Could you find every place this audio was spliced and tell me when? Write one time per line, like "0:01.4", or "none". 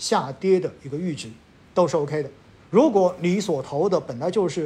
0:02.6